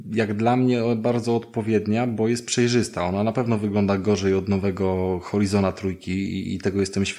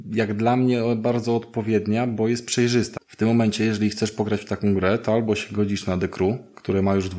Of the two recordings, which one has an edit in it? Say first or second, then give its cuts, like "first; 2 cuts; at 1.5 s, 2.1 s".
second; 1 cut; at 3.0 s